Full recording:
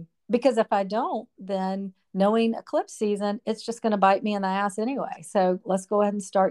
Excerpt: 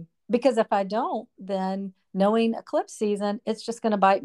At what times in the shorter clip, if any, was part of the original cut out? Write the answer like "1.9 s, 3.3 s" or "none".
none